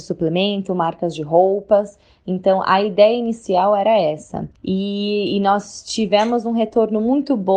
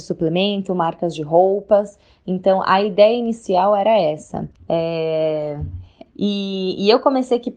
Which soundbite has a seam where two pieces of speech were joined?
second; 2 cuts; at 4.6 s, 6.1 s

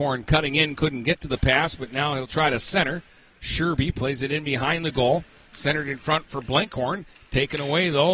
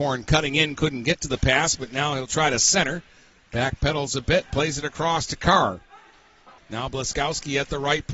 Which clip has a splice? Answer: second; 2 cuts; at 3.4 s, 6.6 s

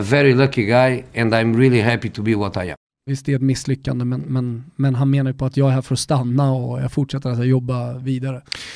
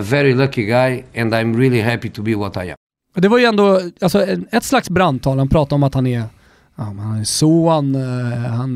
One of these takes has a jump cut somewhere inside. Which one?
first; 1 cut; at 3.1 s

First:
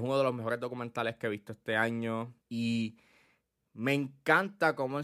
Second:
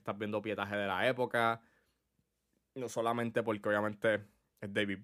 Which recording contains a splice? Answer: first; 1 cut; at 2.4 s

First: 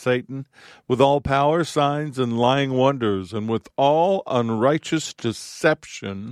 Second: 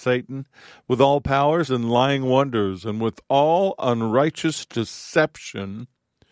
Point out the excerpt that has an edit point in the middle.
second; 1 cut; at 1.7 s

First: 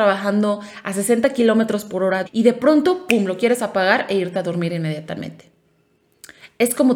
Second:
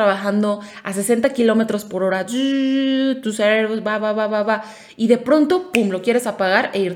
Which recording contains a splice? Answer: first; 1 cut; at 2.3 s

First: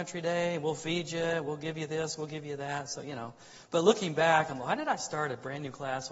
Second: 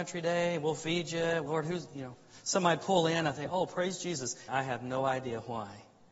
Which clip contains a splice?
second; 2 cuts; at 1.5 s, 4.5 s

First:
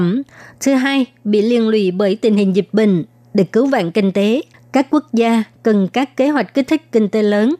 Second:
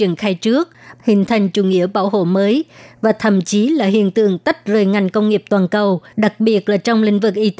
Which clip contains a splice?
second; 2 cuts; at 1.0 s, 6.1 s

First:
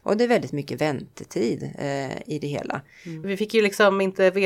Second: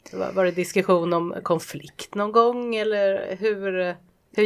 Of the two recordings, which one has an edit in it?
first; 1 cut; at 3.2 s

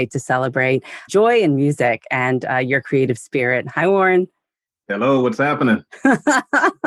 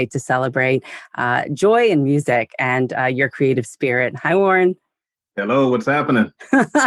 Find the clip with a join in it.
first; 1 cut; at 1.1 s

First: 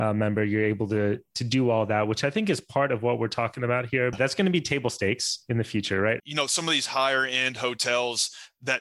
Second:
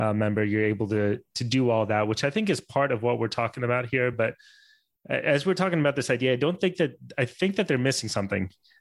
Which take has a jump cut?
first; 2 cuts; at 4.1 s, 6.2 s

